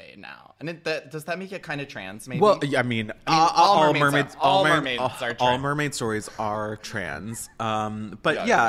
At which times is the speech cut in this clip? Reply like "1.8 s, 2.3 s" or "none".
none